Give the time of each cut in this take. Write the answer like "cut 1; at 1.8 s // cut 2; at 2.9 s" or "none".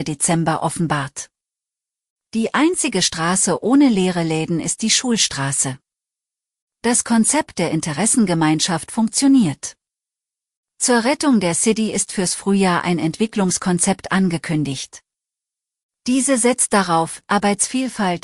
cut 1; at 17.2 s